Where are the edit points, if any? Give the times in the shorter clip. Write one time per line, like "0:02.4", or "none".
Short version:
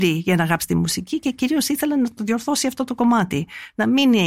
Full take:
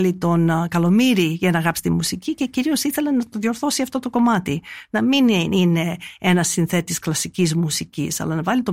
none